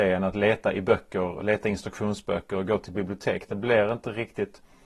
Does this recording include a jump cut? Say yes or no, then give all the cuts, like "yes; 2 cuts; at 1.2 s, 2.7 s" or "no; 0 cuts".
yes; 1 cut; at 1.4 s